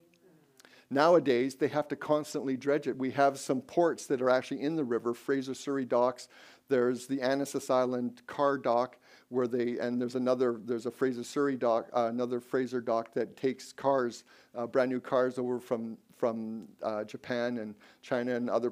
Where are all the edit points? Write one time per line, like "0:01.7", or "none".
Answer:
none